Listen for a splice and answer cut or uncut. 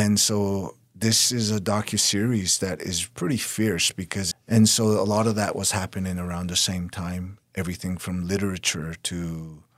cut